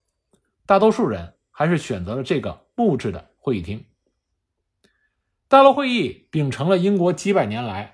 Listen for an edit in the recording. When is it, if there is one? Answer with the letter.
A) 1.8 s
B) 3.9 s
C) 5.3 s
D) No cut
D